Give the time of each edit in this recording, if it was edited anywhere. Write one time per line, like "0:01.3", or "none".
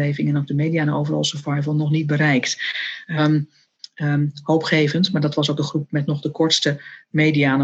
0:03.2